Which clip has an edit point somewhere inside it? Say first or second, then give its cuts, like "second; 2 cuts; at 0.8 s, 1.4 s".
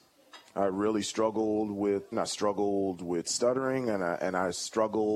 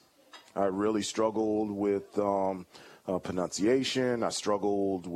first; 1 cut; at 2.1 s